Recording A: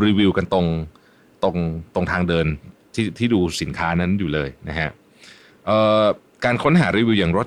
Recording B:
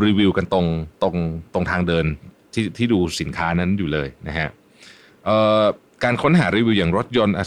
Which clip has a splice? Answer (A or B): B